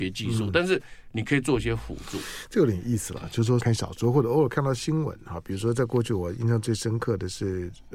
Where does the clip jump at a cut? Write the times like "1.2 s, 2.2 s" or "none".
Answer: 3.6 s